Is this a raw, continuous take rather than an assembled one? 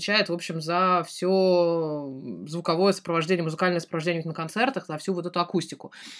yes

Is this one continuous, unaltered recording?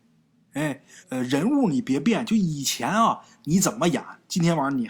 no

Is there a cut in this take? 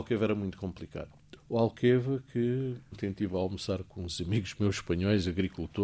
yes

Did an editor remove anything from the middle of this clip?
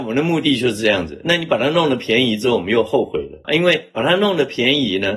no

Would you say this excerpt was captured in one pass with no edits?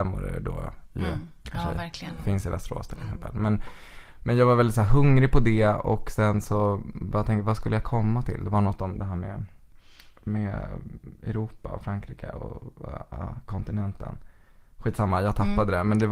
yes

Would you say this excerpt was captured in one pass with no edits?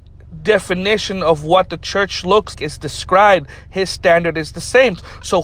no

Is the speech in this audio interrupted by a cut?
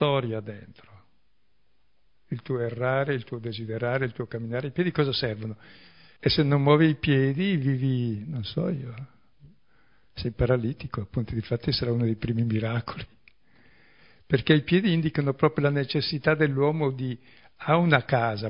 yes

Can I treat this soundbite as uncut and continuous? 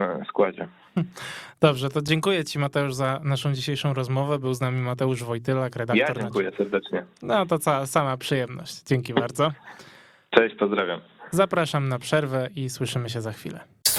yes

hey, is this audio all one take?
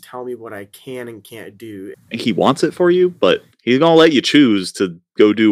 no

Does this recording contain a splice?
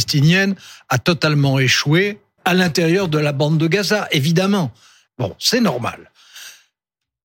yes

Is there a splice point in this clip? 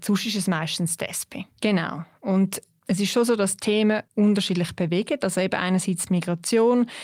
yes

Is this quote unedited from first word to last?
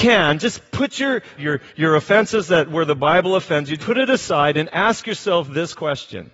no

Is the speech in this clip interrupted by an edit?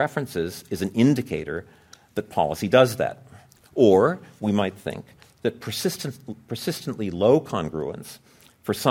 no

